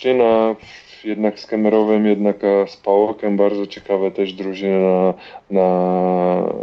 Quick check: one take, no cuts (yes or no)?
yes